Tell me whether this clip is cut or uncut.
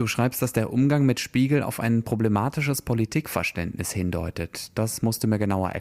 uncut